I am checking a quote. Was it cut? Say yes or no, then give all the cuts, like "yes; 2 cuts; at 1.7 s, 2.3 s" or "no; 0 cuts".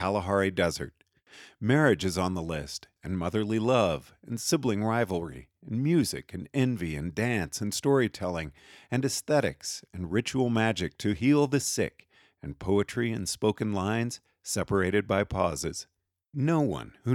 yes; 1 cut; at 3.0 s